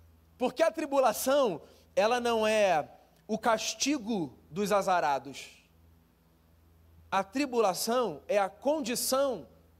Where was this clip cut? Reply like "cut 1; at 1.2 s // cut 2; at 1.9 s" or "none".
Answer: none